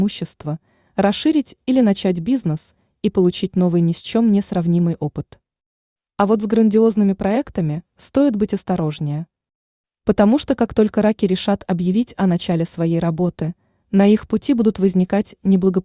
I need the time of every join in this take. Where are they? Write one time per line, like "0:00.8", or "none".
none